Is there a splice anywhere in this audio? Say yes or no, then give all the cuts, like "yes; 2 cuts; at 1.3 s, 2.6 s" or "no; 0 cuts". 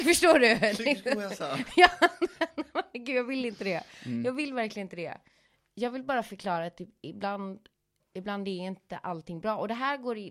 no; 0 cuts